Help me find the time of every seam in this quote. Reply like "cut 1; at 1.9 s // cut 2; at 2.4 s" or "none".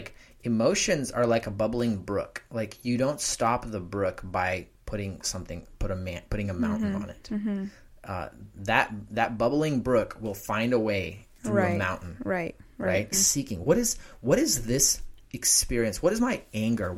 cut 1; at 11.4 s // cut 2; at 13.1 s